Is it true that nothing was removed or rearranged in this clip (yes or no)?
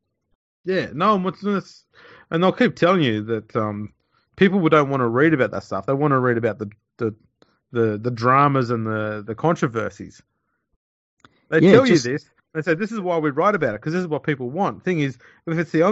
yes